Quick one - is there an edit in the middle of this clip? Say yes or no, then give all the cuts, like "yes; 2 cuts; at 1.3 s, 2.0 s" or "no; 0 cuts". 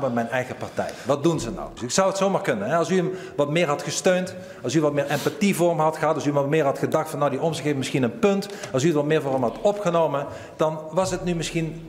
yes; 1 cut; at 1.8 s